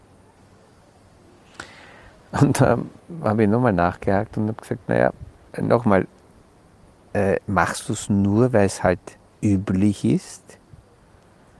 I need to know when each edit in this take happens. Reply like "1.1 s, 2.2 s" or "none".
none